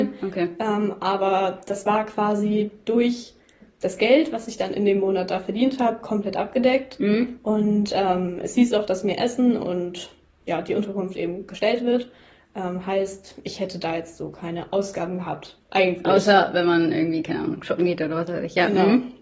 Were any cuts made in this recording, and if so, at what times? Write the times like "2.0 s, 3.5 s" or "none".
none